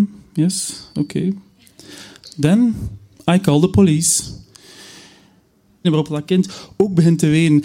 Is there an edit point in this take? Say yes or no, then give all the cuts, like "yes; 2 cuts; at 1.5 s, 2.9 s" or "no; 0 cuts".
yes; 1 cut; at 5.8 s